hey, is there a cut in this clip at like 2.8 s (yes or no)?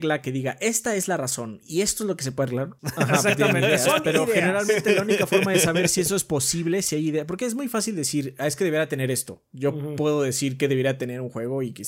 yes